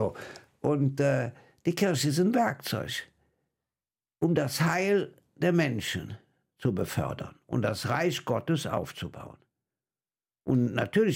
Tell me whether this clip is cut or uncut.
uncut